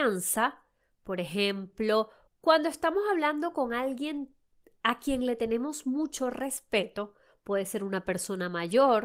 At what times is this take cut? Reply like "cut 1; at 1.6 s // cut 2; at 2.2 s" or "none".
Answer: cut 1; at 2.3 s